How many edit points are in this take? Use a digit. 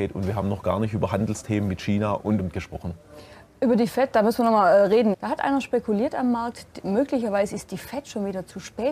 2